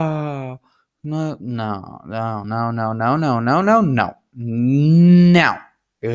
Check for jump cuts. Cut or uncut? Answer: cut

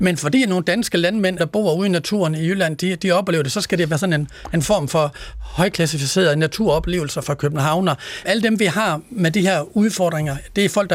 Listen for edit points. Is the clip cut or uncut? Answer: cut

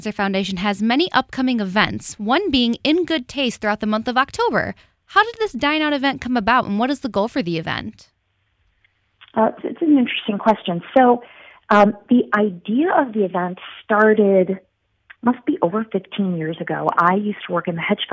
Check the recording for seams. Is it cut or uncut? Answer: uncut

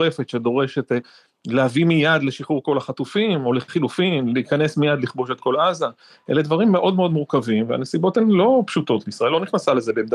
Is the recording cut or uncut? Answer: uncut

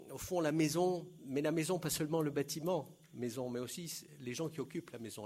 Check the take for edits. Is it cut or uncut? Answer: uncut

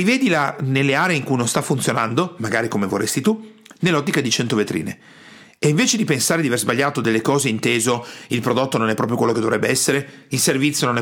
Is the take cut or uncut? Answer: uncut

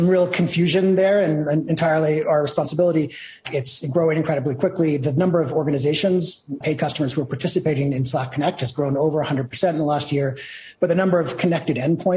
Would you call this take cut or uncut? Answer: cut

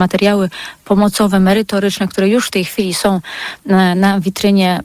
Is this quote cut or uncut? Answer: uncut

